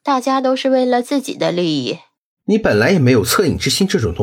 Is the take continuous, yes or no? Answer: no